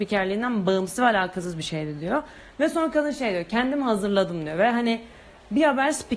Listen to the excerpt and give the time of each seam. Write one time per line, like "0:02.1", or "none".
none